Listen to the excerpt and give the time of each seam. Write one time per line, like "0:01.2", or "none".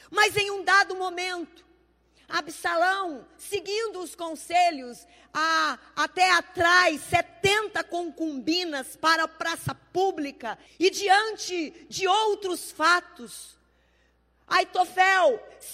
0:10.7

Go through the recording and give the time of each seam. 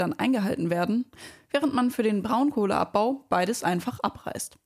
none

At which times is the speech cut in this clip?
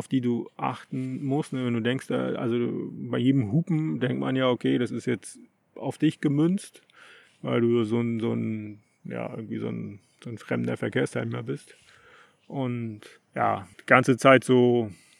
0:13.7

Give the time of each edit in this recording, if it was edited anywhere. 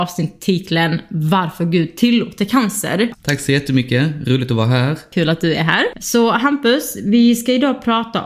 0:03.1

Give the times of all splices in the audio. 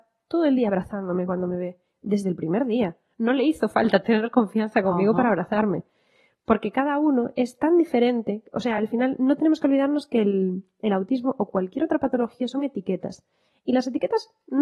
none

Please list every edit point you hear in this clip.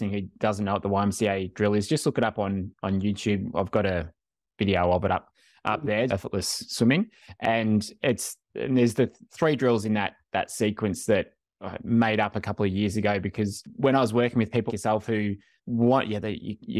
0:06.1
0:14.7

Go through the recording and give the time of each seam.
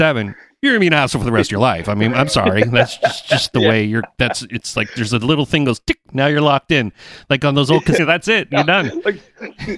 0:08.0

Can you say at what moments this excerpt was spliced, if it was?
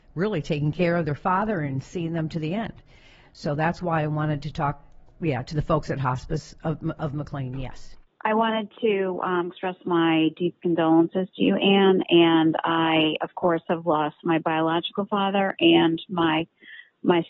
none

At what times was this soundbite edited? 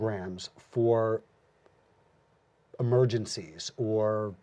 none

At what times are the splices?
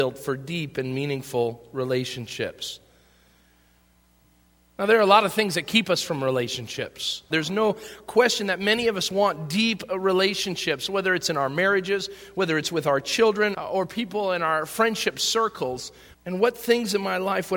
0:07.3
0:13.5
0:16.1

